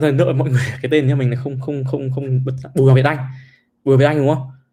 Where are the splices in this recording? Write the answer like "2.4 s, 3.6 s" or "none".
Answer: none